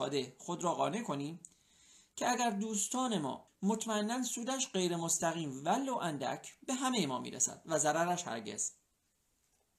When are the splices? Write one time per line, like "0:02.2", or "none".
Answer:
0:03.5